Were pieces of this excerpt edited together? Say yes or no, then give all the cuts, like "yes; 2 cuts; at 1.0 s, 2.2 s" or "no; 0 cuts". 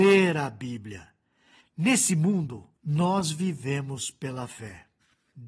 yes; 2 cuts; at 1.6 s, 2.8 s